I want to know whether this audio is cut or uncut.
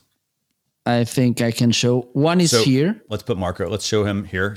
uncut